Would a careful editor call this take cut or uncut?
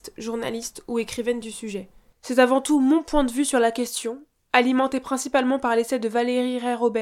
cut